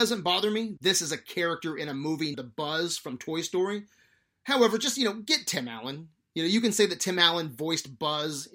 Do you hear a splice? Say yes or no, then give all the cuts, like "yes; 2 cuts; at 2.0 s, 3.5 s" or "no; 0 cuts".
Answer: yes; 1 cut; at 2.3 s